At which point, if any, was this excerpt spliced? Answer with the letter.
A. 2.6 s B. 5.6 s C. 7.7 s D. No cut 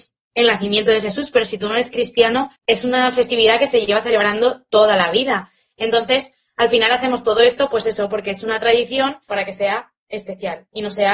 A